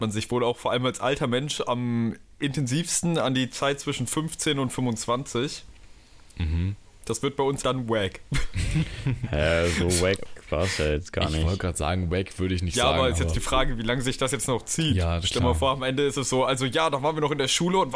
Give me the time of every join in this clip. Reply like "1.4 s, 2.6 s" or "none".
7.6 s